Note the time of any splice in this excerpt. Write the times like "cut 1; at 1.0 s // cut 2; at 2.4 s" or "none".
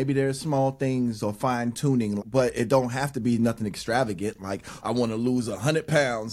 cut 1; at 2.2 s // cut 2; at 4.8 s